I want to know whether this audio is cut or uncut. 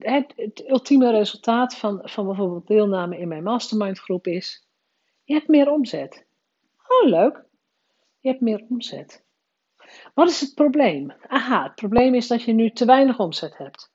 uncut